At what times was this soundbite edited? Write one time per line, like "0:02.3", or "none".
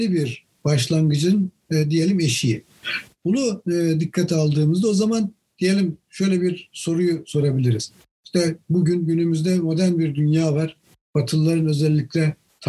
none